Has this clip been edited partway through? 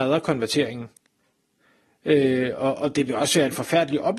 no; 0 cuts

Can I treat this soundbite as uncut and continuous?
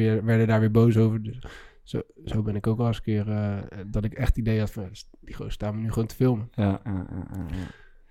yes; 0 cuts

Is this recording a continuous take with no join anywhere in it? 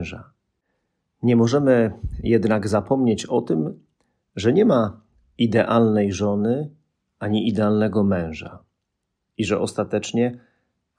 yes; 0 cuts

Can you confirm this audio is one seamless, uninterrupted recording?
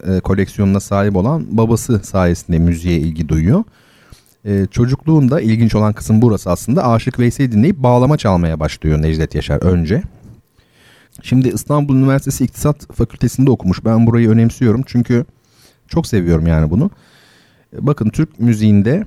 no; 1 cut; at 11.1 s

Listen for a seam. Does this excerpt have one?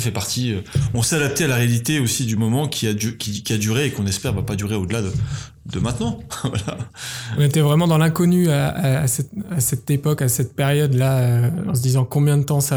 no; 0 cuts

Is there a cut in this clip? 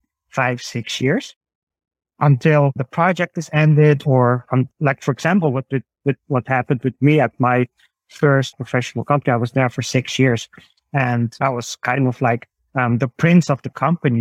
yes; 1 cut; at 8.5 s

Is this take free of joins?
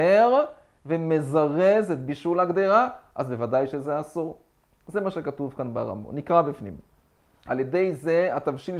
no; 1 cut; at 7.5 s

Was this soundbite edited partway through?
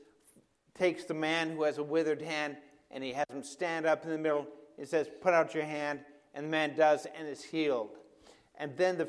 no; 0 cuts

